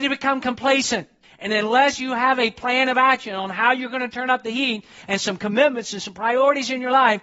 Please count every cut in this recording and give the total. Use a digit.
1